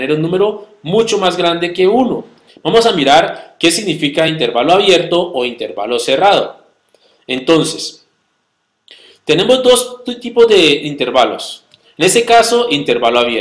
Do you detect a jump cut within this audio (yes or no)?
yes